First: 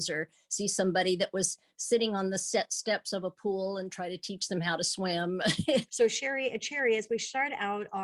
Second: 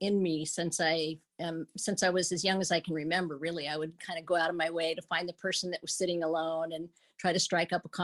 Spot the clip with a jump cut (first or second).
first